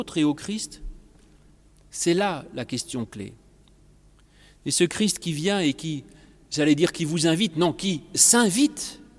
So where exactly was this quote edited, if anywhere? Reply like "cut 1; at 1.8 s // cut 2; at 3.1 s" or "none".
none